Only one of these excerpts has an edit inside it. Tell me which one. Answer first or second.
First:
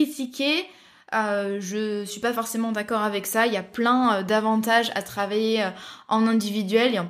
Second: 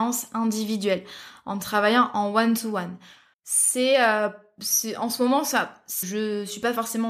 second